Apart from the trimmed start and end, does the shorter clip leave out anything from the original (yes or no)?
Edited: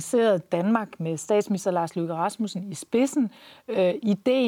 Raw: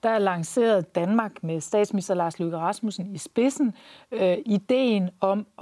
no